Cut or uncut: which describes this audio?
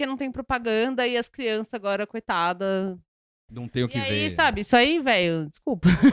uncut